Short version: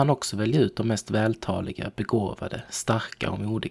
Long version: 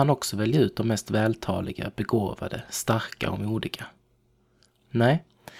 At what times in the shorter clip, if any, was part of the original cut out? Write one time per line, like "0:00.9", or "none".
none

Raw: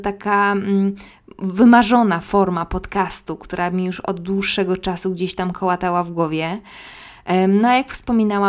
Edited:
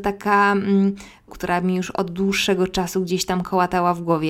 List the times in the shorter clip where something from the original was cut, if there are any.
0:01.3

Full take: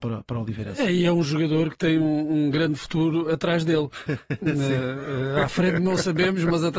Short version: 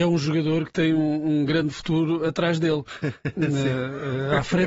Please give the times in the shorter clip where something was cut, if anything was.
none

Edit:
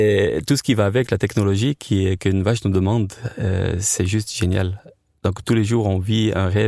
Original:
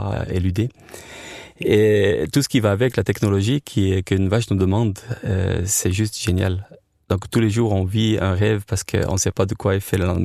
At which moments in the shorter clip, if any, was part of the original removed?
none

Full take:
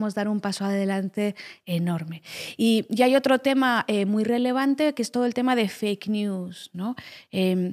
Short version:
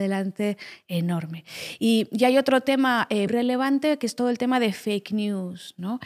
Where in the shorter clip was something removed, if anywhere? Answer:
0:03.3

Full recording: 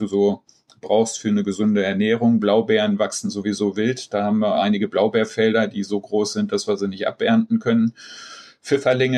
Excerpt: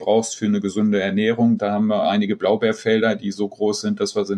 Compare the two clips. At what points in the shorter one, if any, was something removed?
0:01.6

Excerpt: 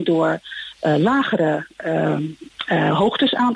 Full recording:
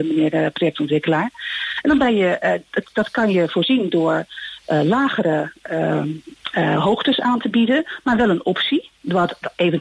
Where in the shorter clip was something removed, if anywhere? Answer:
none

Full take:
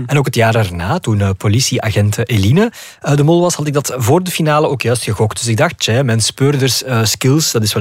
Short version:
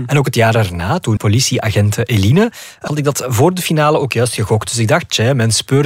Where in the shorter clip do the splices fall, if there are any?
0:01.2
0:02.9

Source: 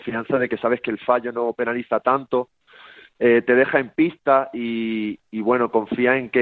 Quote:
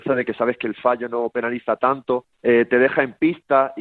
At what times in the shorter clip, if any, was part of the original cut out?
0:02.3

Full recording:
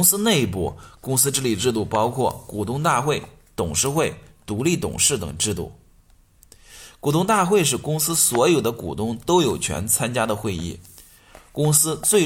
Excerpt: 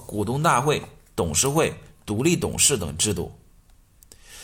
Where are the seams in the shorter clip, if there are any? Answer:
none

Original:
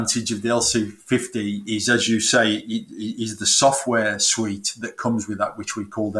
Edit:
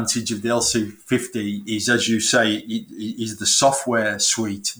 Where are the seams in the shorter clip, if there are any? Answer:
none

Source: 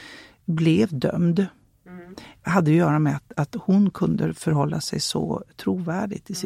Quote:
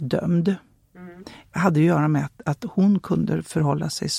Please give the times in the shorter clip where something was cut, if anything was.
none

